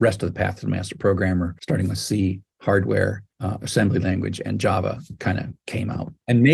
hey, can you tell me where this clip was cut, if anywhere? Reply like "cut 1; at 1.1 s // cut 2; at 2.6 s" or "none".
none